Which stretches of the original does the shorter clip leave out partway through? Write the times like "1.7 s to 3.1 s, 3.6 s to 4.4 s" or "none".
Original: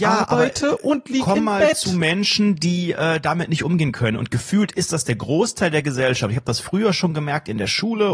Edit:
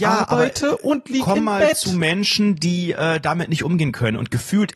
none